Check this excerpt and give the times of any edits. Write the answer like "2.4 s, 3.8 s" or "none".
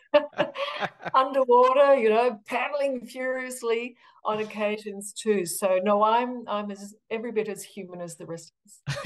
none